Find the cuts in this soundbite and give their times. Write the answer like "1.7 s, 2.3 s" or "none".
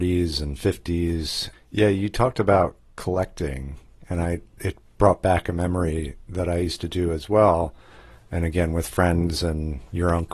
1.5 s